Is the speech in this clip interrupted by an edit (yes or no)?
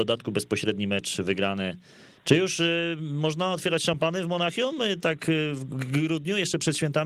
no